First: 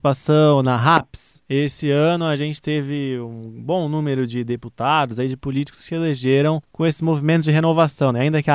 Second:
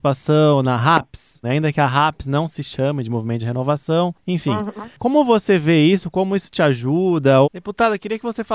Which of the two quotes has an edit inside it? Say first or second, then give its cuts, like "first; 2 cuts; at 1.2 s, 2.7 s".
second; 2 cuts; at 1.4 s, 7.4 s